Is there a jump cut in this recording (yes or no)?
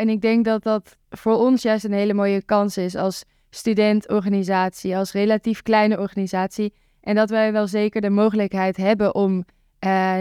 no